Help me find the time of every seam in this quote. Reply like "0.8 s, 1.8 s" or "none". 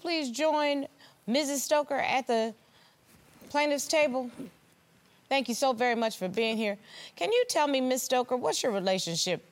none